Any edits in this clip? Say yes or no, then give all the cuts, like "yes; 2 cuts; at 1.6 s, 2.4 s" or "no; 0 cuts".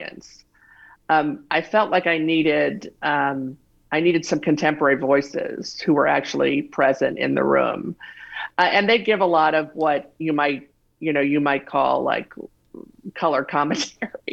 no; 0 cuts